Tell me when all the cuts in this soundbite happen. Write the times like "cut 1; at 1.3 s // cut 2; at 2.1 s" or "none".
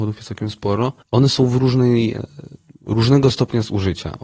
cut 1; at 1.0 s